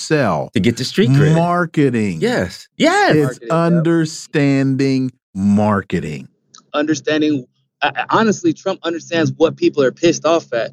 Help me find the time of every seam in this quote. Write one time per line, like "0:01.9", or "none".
0:06.7